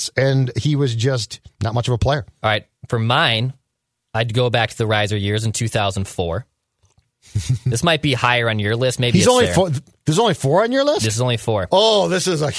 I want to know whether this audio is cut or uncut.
uncut